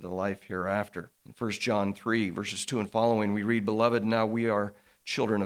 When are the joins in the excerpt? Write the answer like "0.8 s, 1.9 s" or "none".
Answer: 1.2 s